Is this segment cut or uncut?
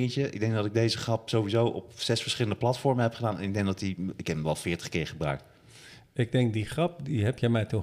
uncut